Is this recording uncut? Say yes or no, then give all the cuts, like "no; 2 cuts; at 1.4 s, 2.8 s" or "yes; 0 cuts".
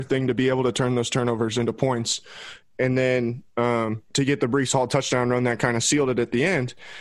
no; 2 cuts; at 2.6 s, 4.1 s